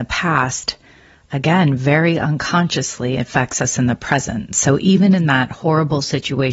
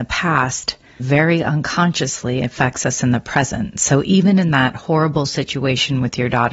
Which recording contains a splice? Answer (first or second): second